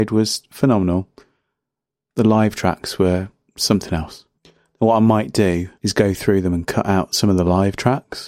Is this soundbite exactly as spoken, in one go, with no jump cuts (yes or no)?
no